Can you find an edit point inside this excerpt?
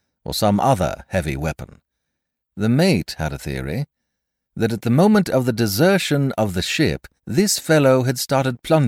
yes; 2 cuts; at 2.4 s, 7.2 s

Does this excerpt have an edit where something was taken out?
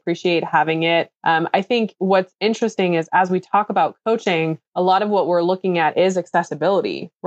no; 0 cuts

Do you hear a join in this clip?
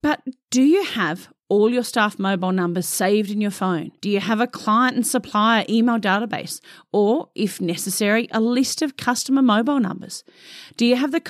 yes; 1 cut; at 4.0 s

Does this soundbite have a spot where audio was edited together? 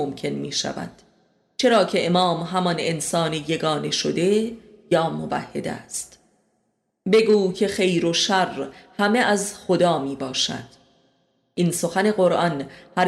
no; 0 cuts

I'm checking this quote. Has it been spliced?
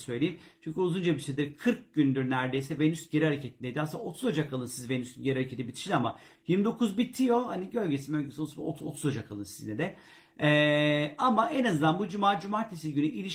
no; 0 cuts

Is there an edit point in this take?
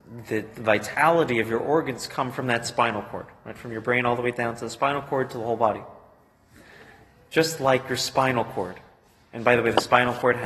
no; 0 cuts

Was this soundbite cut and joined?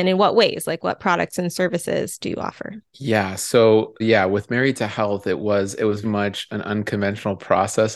yes; 3 cuts; at 2.9 s, 4.0 s, 6.0 s

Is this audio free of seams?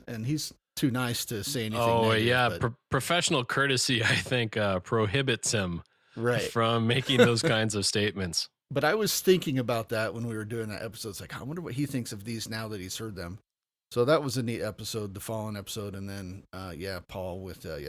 yes; 0 cuts

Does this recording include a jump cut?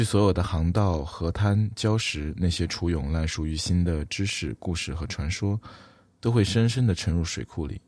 no; 0 cuts

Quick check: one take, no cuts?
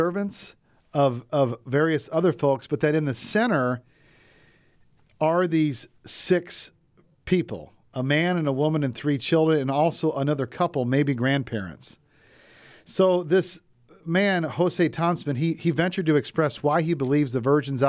yes; 0 cuts

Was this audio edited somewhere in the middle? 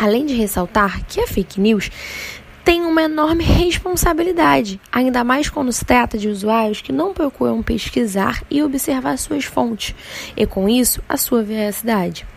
no; 0 cuts

